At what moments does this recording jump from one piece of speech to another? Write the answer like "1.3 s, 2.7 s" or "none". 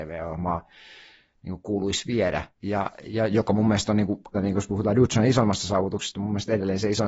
2.5 s, 4.3 s

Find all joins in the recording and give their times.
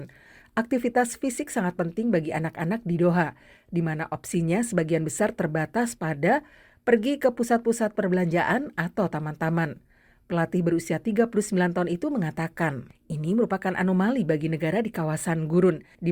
12.9 s

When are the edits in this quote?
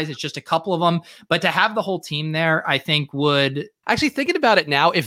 3.8 s

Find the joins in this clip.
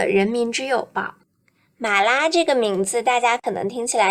none

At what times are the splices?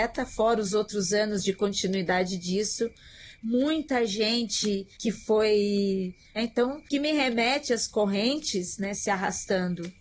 4.9 s, 6.4 s, 8.9 s

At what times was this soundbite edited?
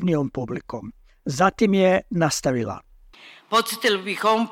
1.1 s

